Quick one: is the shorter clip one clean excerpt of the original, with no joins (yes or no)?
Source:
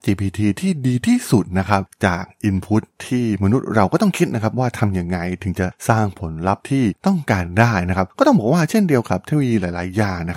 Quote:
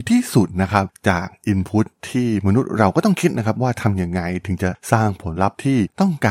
no